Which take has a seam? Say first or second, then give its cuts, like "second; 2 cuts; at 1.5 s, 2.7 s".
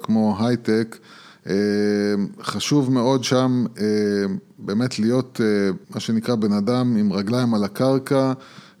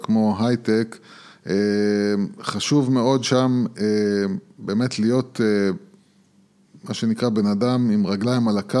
first; 1 cut; at 5.8 s